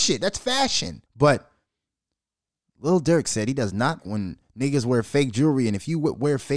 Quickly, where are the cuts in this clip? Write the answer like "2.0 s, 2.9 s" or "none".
1.1 s, 4.0 s